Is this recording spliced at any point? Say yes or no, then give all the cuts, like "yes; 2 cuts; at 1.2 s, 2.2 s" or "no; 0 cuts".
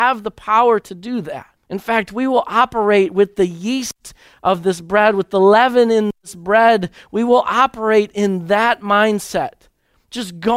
yes; 1 cut; at 1.6 s